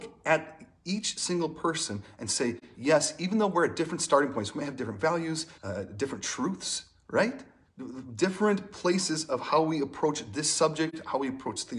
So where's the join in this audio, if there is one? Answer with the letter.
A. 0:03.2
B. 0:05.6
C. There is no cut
B